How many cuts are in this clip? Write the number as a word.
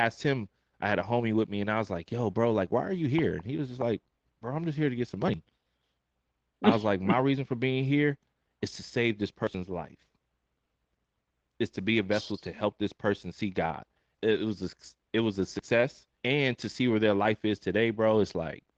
two